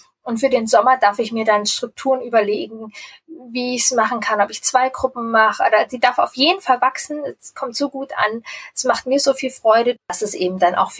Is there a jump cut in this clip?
yes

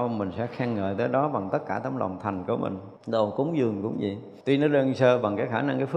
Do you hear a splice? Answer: yes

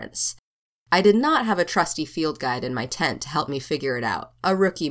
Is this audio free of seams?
yes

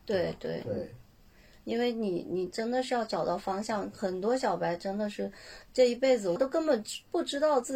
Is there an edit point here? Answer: yes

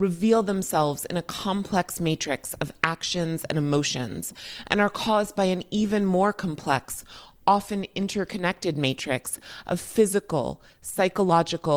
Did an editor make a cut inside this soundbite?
no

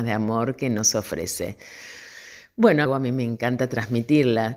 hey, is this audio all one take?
no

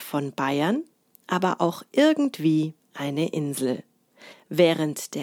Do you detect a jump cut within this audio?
yes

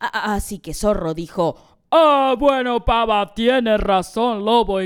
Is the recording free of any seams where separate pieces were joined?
yes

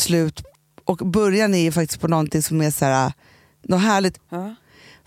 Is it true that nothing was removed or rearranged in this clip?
no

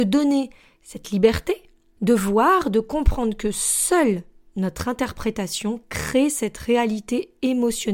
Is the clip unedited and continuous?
no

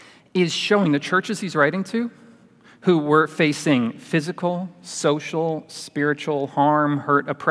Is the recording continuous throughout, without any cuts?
yes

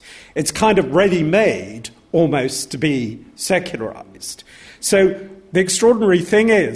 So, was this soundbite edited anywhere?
no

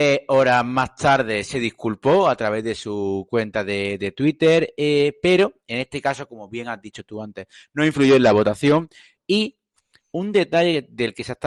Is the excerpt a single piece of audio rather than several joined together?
yes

